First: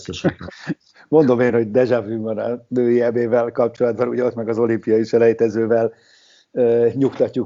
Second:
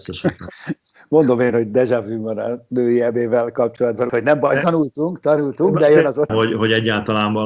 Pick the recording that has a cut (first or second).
second